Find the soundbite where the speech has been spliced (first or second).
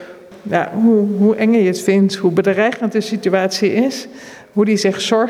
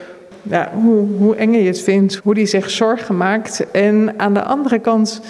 second